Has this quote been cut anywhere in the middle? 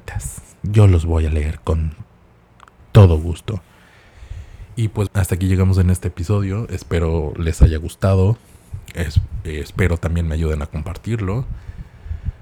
yes; 1 cut; at 5.1 s

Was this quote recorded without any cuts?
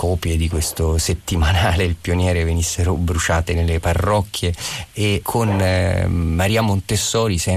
no; 1 cut; at 5.2 s

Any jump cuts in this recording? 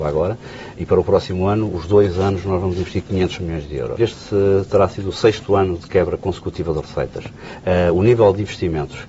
yes; 1 cut; at 4.0 s

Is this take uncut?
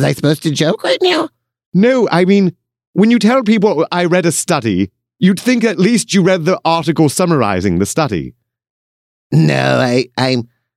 yes; 0 cuts

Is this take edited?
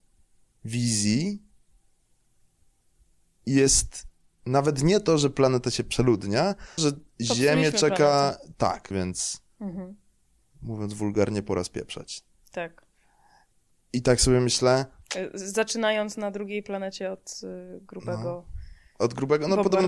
yes; 2 cuts; at 6.8 s, 8.9 s

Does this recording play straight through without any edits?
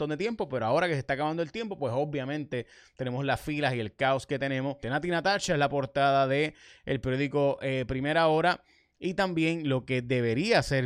no; 1 cut; at 4.8 s

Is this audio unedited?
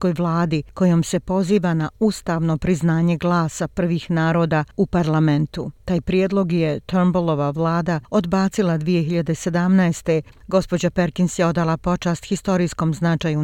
no; 1 cut; at 10.3 s

